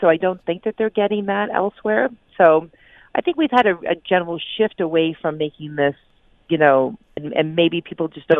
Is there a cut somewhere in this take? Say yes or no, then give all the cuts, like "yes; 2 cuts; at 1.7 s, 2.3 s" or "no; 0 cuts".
yes; 1 cut; at 7.2 s